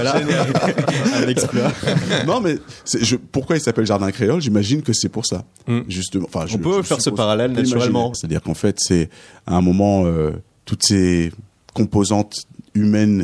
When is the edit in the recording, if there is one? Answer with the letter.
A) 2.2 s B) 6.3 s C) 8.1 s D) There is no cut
C